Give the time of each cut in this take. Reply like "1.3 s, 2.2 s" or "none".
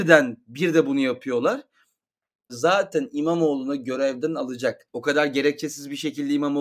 2.5 s, 4.9 s